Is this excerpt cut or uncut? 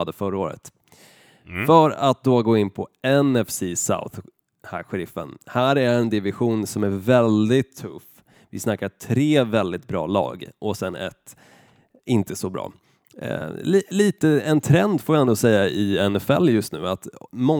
uncut